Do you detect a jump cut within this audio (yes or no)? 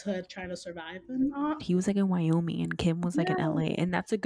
yes